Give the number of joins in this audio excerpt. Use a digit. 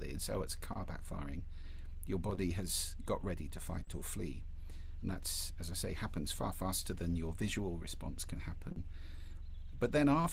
0